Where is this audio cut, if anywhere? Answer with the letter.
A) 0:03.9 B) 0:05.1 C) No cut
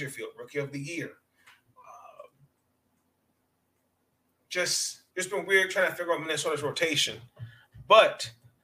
B